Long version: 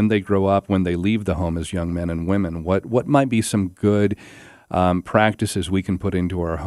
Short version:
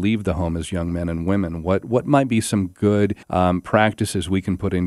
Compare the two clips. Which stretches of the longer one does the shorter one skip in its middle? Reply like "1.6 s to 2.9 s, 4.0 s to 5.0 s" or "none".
4.2 s to 4.6 s